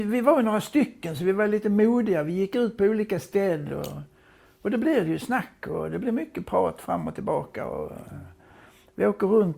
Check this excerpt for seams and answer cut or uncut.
uncut